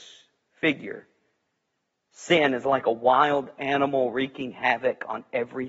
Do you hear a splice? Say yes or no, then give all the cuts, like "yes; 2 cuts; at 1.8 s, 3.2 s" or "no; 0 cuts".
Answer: no; 0 cuts